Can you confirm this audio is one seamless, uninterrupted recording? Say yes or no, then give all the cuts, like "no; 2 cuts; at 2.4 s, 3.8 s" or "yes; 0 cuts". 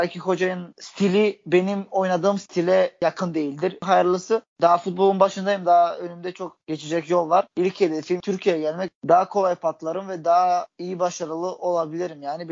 yes; 0 cuts